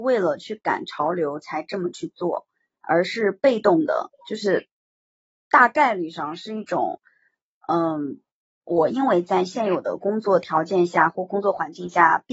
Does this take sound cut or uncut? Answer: uncut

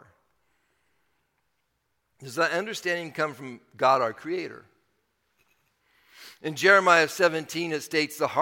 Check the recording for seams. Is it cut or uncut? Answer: uncut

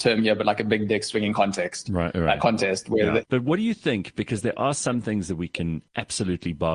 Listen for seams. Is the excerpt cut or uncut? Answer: cut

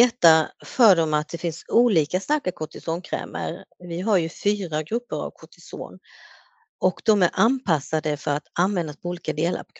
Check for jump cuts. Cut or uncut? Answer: uncut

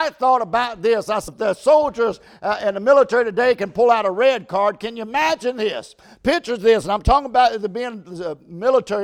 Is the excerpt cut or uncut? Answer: cut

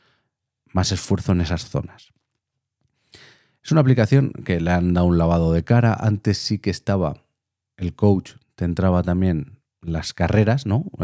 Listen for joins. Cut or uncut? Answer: cut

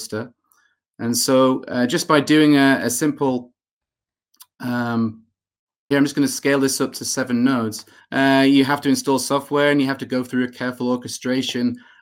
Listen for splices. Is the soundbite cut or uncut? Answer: cut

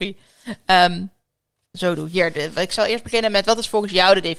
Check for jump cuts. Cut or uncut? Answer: cut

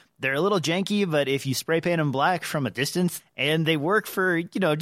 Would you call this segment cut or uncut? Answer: cut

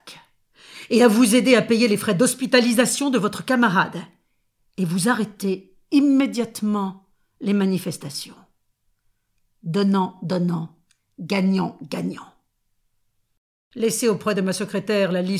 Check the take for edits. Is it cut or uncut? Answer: uncut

